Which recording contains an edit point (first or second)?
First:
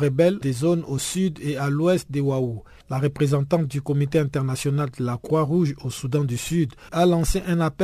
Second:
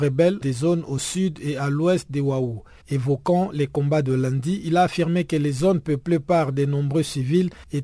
first